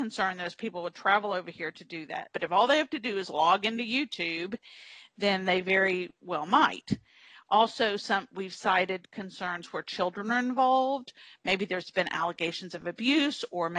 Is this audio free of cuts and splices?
no; 1 cut; at 2.3 s

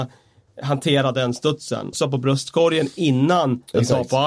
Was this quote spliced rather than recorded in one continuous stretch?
yes; 1 cut; at 1.9 s

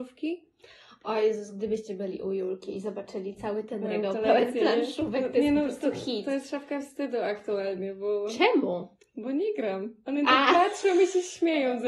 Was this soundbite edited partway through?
no; 0 cuts

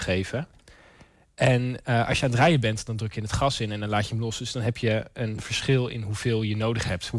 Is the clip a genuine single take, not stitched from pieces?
yes; 0 cuts

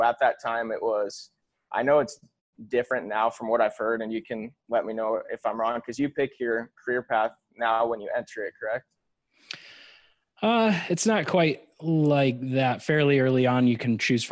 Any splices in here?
no; 0 cuts

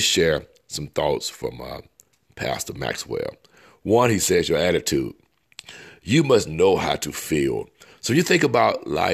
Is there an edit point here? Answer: no; 0 cuts

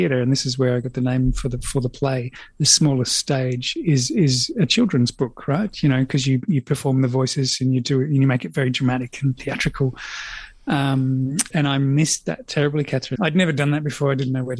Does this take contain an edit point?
yes; 2 cuts; at 11.5 s, 13.2 s

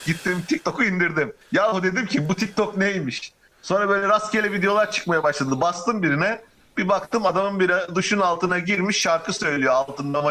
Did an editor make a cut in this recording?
yes; 1 cut; at 1.4 s

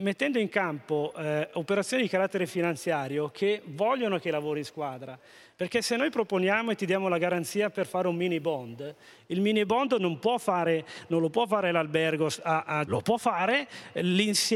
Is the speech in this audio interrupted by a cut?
yes; 1 cut; at 12.8 s

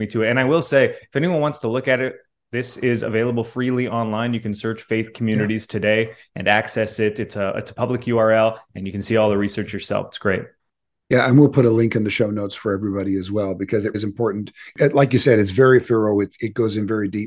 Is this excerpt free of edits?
no; 1 cut; at 13.9 s

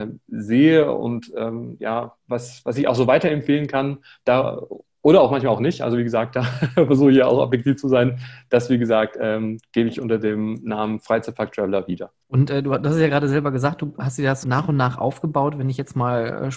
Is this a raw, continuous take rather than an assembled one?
no; 2 cuts; at 12.2 s, 14.4 s

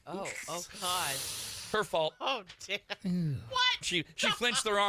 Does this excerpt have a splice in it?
yes; 1 cut; at 3.8 s

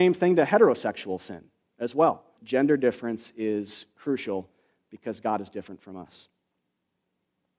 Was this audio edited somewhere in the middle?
yes; 1 cut; at 2.4 s

